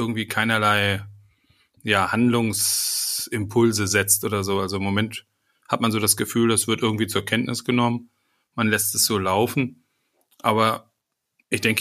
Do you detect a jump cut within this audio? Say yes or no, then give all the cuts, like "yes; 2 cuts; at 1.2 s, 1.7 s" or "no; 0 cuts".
no; 0 cuts